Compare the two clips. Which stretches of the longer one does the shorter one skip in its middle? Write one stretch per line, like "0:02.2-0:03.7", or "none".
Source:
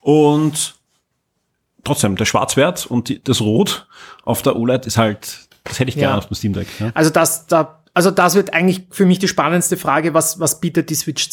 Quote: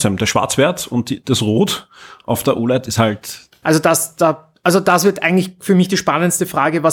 0:05.6-0:06.9